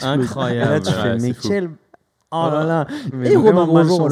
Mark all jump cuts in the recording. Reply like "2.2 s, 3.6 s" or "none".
3.1 s